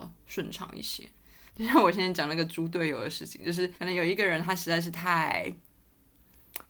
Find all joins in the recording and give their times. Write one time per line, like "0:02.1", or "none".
0:01.5
0:03.7